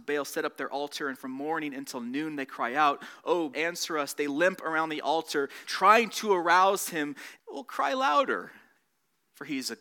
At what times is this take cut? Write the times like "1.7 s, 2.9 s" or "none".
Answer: 3.5 s, 5.6 s, 7.4 s